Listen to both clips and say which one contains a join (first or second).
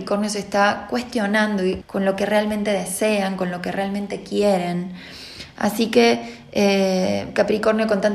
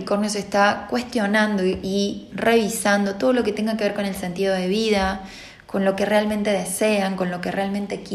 first